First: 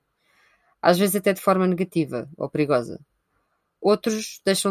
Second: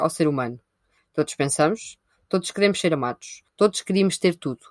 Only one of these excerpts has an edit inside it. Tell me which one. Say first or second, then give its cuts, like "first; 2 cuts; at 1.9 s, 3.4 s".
second; 2 cuts; at 1.0 s, 3.5 s